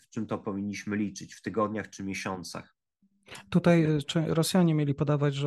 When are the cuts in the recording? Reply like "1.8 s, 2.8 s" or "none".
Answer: none